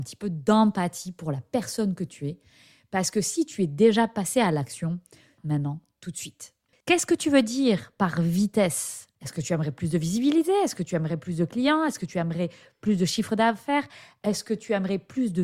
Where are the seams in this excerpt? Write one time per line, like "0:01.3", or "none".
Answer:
0:05.4
0:06.7
0:09.1